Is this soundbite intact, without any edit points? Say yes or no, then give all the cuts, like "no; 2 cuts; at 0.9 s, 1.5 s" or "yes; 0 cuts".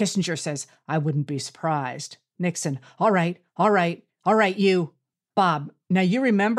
yes; 0 cuts